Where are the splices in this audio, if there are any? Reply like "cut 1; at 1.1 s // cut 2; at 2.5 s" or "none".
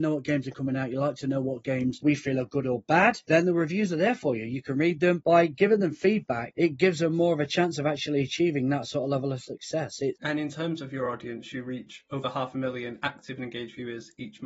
cut 1; at 5.2 s